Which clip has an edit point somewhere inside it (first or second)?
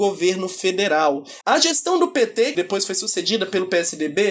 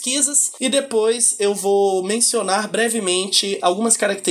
first